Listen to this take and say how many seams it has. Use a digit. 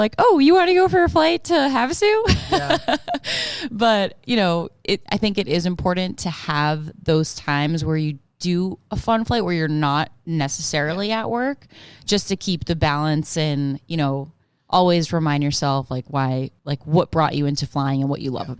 2